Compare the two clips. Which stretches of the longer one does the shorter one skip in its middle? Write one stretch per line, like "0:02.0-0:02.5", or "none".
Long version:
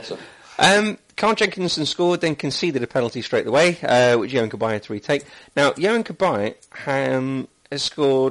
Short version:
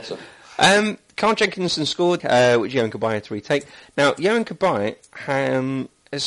0:02.2-0:03.8